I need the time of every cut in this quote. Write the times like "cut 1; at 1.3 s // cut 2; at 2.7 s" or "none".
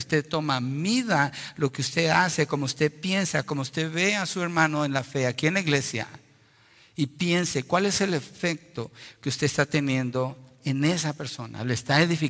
none